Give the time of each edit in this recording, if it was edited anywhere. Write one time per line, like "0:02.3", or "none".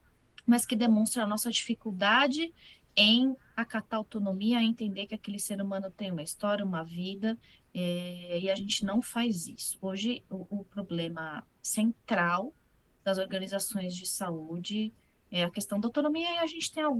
none